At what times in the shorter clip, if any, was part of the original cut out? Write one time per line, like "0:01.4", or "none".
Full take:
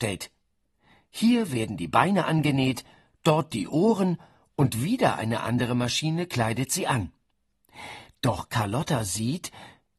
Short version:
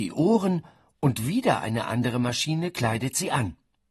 none